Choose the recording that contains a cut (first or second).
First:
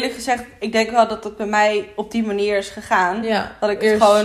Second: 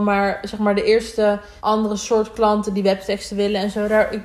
second